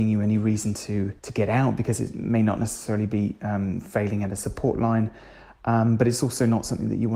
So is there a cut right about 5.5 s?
no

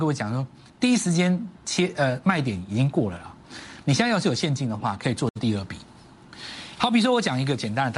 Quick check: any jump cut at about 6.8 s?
yes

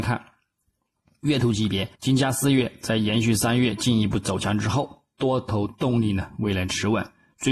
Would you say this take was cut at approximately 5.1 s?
no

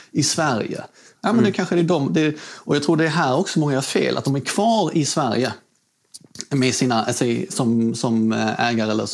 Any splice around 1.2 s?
yes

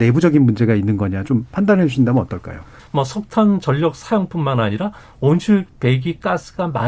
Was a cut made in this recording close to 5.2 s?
no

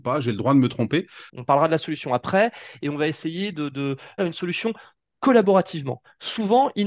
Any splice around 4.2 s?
yes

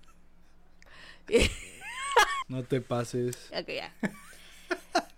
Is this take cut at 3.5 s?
yes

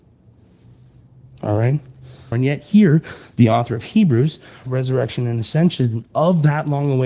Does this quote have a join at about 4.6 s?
yes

